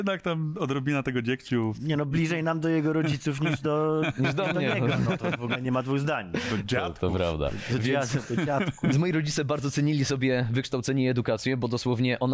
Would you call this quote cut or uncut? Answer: uncut